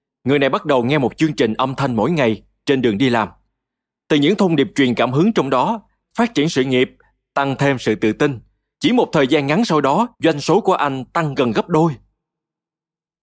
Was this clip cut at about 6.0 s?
yes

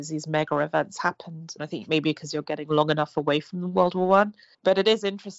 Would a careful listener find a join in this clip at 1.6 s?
yes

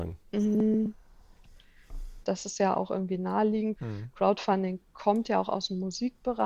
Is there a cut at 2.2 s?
yes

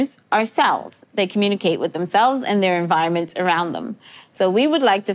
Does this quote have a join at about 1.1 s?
yes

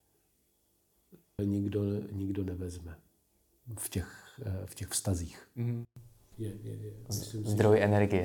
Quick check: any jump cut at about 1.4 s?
yes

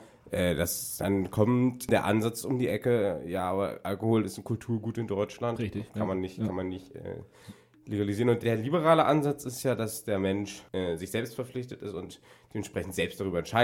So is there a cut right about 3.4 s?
no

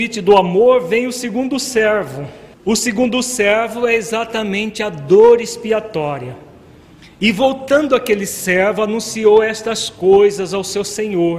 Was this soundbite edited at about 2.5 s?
yes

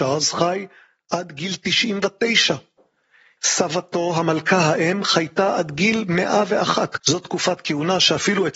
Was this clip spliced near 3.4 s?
yes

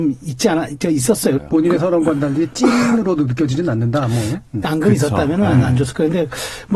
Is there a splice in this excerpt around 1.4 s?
yes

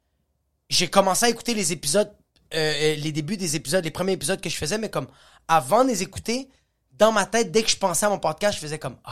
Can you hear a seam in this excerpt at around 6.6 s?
no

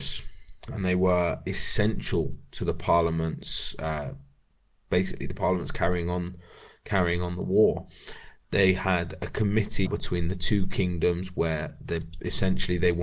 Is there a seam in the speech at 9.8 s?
yes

